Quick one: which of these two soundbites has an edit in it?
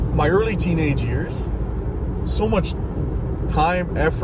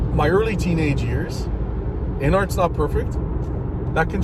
second; 1 cut; at 2.2 s

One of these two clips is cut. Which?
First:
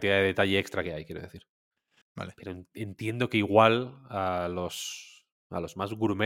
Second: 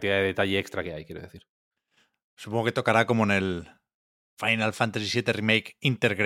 first; 1 cut; at 2.0 s

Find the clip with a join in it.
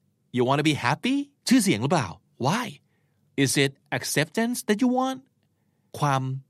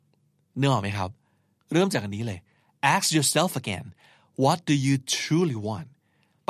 first; 1 cut; at 1.4 s

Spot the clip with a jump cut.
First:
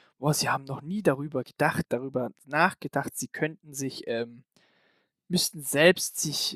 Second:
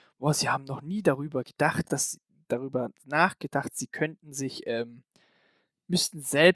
first; 1 cut; at 1.8 s

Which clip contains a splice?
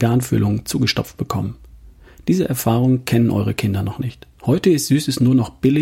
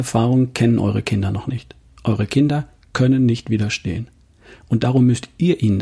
first; 1 cut; at 4.4 s

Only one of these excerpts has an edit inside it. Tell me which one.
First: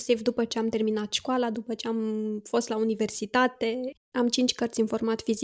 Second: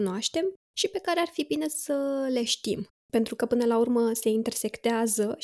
first; 1 cut; at 4.0 s

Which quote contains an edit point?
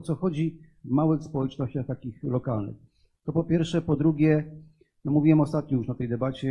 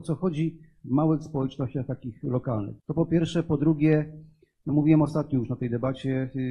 second; 1 cut; at 2.8 s

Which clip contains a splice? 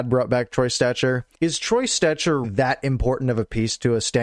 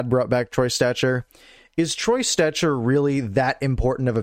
first; 2 cuts; at 1.3 s, 2.4 s

